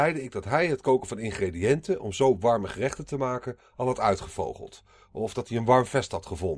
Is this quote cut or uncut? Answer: uncut